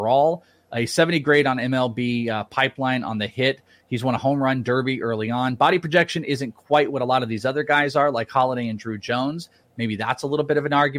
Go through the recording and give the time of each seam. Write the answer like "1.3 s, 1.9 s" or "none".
none